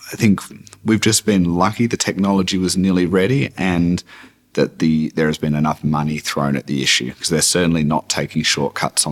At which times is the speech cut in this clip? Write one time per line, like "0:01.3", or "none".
none